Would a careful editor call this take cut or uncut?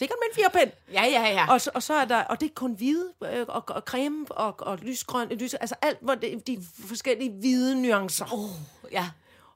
uncut